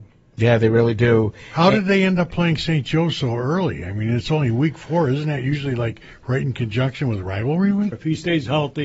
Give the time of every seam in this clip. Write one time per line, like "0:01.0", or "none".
0:07.9